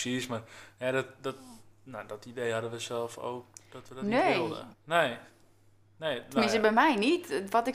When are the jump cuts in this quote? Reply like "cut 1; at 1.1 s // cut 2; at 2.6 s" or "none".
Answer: cut 1; at 4.7 s